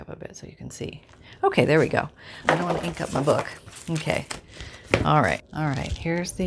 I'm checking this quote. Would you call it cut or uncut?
cut